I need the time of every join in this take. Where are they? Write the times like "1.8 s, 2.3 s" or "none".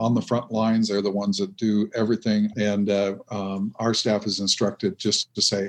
2.5 s